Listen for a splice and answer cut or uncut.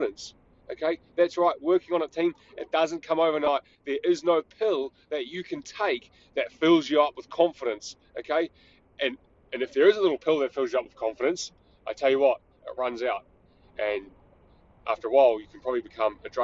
cut